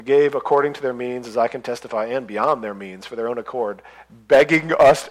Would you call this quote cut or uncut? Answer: uncut